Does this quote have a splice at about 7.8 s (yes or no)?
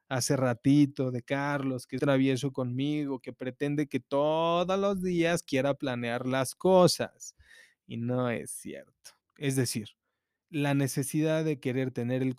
no